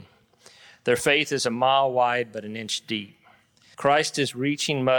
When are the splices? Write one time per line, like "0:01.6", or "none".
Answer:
0:03.7